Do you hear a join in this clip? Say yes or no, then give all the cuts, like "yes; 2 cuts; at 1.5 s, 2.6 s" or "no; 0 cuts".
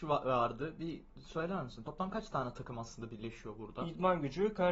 no; 0 cuts